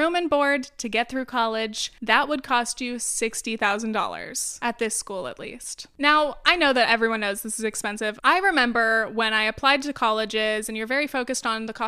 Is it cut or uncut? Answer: cut